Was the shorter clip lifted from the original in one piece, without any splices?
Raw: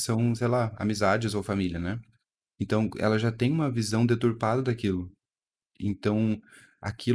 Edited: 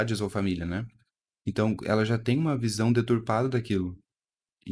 yes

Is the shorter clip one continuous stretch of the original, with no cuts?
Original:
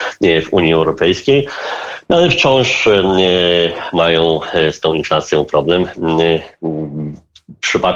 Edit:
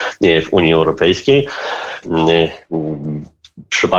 no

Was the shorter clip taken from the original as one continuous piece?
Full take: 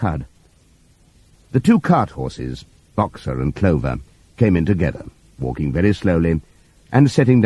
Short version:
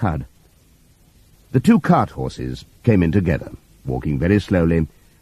no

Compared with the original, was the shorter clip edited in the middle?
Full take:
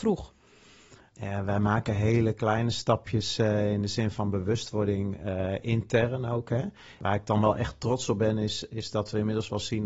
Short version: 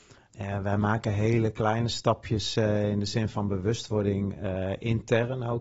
no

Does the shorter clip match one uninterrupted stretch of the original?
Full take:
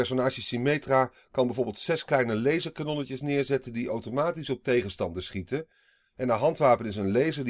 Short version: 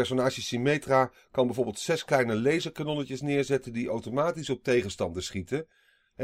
yes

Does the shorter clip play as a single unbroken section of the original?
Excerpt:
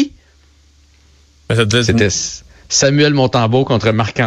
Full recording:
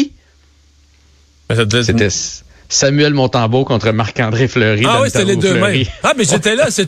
yes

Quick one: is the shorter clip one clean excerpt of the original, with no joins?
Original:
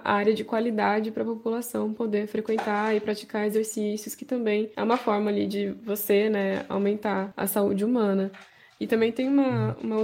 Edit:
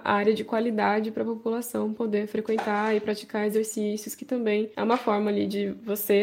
yes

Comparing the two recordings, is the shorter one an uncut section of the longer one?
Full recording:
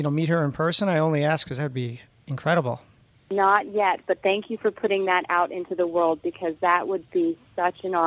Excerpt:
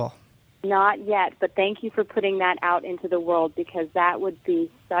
yes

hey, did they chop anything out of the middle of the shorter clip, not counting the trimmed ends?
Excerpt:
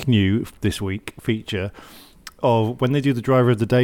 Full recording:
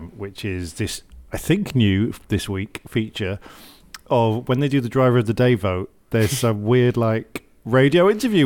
no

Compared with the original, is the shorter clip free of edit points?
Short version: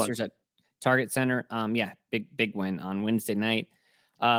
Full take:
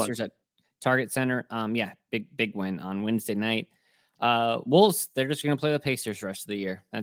yes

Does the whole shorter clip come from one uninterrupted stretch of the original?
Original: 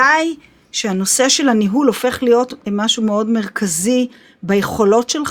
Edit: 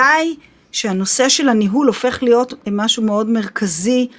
yes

